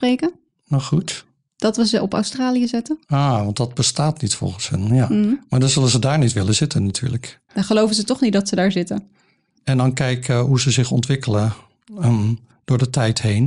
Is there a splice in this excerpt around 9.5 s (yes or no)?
yes